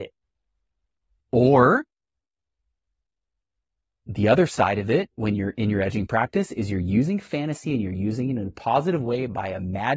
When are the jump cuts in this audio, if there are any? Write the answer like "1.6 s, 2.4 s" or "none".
1.2 s